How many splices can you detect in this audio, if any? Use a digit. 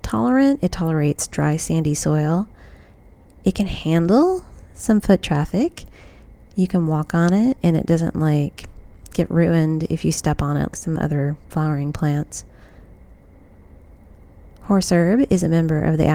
1